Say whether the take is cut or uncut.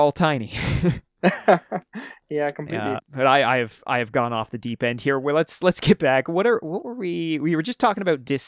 cut